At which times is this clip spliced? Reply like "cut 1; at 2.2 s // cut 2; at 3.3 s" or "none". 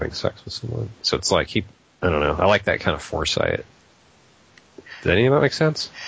none

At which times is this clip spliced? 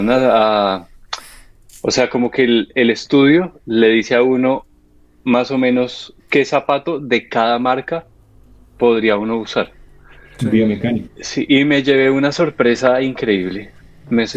cut 1; at 6.2 s // cut 2; at 11.1 s

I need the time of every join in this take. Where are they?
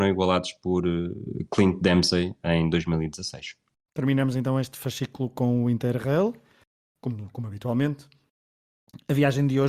none

